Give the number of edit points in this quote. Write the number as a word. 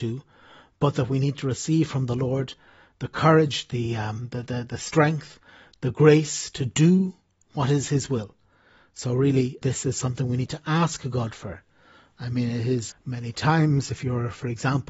two